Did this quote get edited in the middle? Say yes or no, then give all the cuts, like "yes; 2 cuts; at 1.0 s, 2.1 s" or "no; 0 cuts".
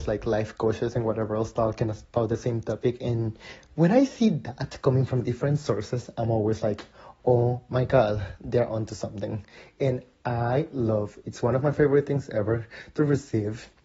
no; 0 cuts